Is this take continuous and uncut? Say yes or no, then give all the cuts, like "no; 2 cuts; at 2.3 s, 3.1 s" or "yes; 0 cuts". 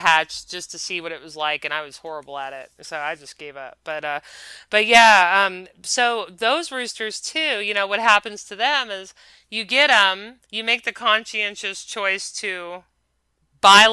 no; 1 cut; at 10.4 s